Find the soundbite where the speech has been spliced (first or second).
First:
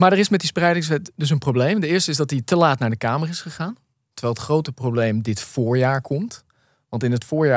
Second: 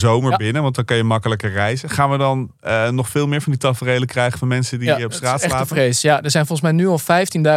first